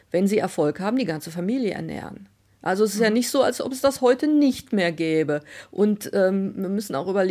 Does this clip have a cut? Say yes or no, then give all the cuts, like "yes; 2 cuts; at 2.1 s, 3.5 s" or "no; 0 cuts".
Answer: no; 0 cuts